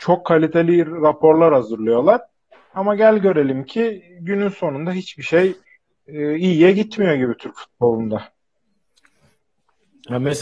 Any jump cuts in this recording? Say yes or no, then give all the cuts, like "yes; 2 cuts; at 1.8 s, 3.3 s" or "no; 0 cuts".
no; 0 cuts